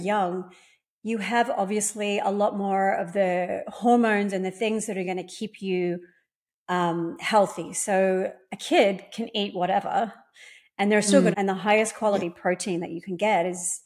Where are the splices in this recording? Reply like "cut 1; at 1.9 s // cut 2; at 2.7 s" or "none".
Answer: cut 1; at 11.3 s